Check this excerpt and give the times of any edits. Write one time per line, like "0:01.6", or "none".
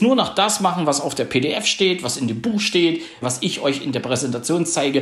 0:03.2